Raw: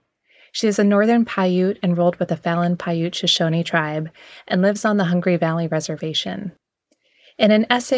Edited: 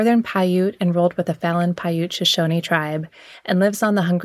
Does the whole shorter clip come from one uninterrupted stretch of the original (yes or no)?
yes